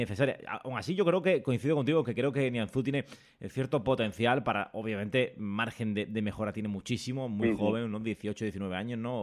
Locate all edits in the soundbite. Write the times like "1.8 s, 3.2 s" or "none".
none